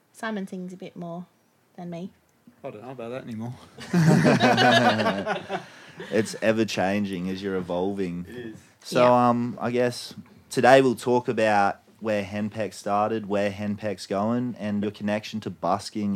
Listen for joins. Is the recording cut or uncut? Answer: cut